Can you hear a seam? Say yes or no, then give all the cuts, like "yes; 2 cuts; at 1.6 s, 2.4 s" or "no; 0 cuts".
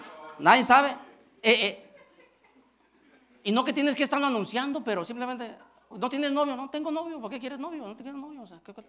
yes; 1 cut; at 5.9 s